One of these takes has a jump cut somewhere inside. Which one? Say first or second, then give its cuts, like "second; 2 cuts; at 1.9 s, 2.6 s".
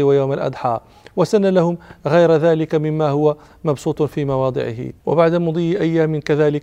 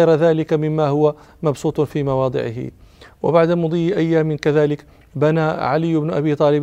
first; 1 cut; at 5.0 s